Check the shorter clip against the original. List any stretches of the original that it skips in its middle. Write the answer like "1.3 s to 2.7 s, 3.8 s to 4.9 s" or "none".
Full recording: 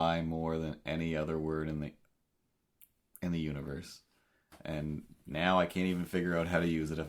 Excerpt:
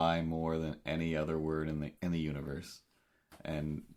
2.0 s to 3.2 s